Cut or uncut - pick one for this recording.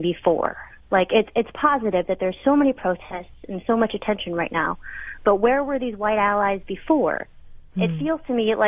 uncut